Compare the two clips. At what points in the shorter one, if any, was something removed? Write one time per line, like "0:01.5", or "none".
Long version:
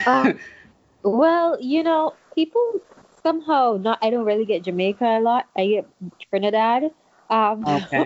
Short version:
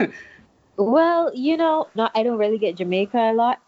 0:02.0